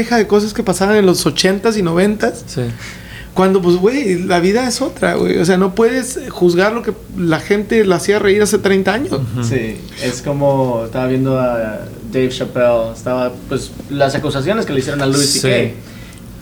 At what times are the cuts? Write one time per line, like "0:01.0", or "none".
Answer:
none